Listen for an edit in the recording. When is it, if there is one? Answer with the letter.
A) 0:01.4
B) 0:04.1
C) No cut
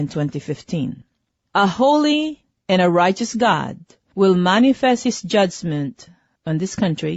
A